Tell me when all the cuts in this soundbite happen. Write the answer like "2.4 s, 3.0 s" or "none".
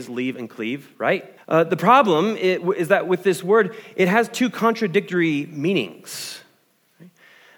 1.4 s